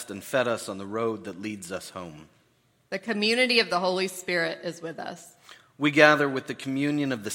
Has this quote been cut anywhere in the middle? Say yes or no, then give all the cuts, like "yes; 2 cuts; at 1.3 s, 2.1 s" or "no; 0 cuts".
no; 0 cuts